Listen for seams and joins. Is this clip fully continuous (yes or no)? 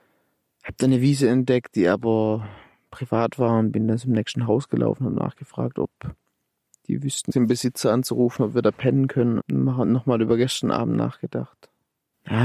no